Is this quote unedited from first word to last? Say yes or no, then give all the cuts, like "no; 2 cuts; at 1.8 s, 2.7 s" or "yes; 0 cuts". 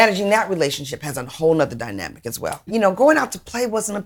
no; 1 cut; at 2.7 s